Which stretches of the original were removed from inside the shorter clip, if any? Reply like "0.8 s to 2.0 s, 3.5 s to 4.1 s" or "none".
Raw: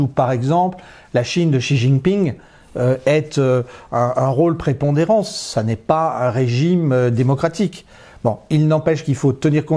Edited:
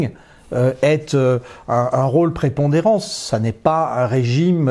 none